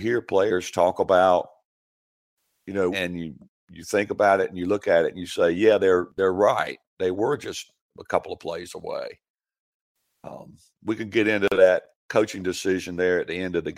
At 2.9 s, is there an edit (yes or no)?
yes